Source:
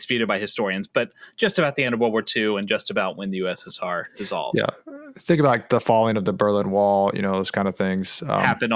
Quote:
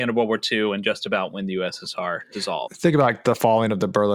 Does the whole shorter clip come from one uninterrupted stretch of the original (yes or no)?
no